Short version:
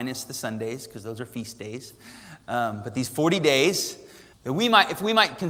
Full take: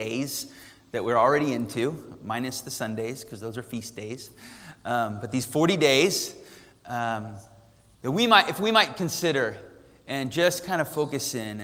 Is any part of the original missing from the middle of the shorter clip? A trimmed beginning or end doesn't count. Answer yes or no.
yes